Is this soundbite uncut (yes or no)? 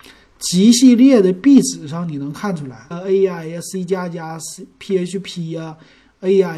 no